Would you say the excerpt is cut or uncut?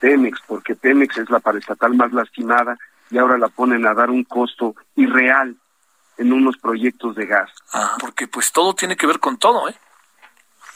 cut